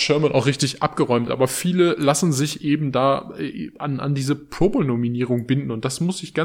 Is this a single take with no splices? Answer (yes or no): yes